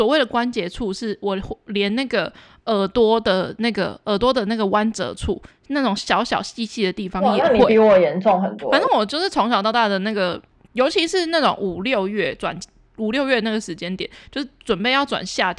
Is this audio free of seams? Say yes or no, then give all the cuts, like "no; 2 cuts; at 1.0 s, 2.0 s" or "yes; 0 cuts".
yes; 0 cuts